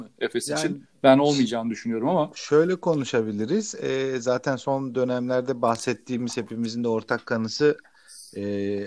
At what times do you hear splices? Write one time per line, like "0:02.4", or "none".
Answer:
none